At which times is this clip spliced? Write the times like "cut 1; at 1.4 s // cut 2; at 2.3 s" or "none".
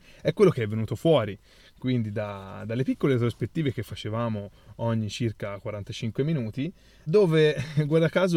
cut 1; at 7.1 s